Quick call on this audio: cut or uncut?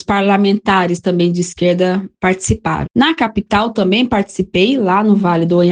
cut